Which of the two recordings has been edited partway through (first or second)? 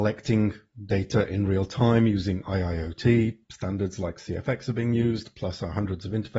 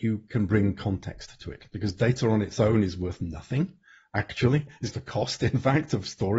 second